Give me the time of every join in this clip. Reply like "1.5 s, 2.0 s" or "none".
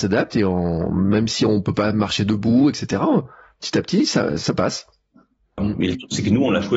5.6 s